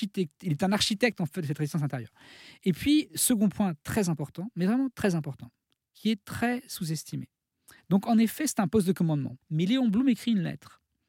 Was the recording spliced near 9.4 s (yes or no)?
yes